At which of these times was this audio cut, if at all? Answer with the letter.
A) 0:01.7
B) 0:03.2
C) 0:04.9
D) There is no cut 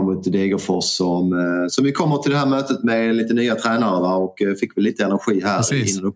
D